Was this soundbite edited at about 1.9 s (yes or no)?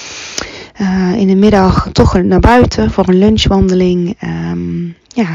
yes